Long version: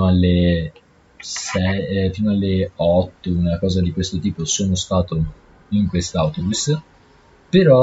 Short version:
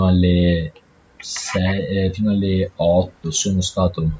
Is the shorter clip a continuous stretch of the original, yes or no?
no